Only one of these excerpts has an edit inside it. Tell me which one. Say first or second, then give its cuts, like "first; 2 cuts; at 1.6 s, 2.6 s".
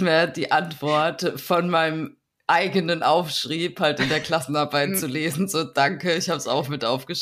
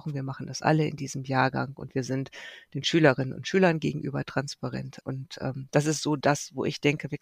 second; 1 cut; at 5.0 s